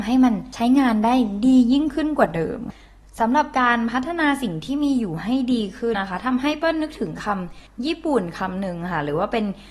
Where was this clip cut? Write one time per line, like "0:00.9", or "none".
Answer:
0:05.9